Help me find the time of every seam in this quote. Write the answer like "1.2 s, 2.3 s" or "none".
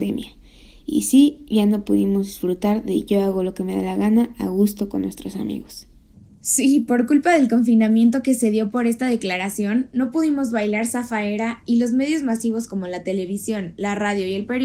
none